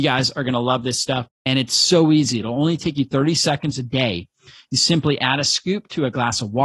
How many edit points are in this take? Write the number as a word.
one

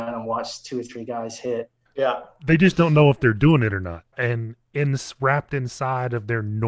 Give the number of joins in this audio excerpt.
two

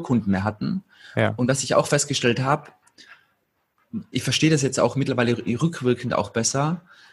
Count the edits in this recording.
one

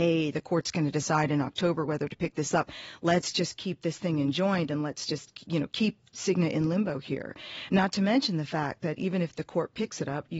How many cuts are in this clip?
zero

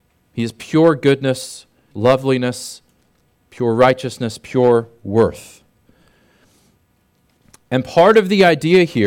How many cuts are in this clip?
one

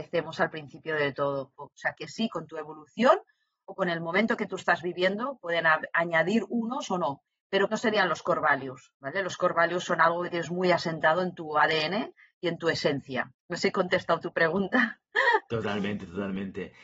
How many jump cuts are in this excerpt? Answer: one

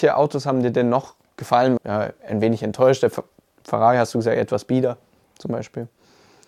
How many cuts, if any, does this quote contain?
one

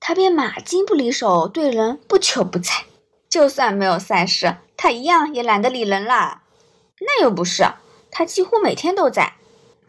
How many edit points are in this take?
two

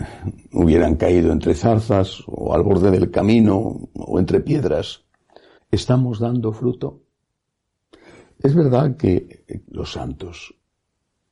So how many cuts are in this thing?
two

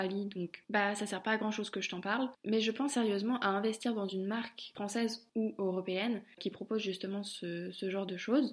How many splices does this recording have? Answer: zero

